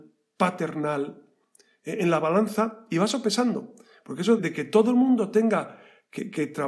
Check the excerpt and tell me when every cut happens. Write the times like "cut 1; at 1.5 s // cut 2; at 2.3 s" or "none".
cut 1; at 4.4 s